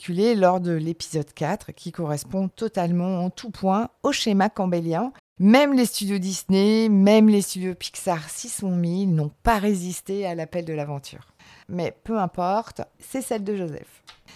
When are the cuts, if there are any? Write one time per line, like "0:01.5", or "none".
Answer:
0:05.2
0:11.6
0:12.9